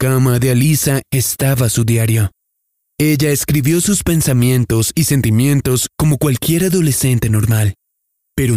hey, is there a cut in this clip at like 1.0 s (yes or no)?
yes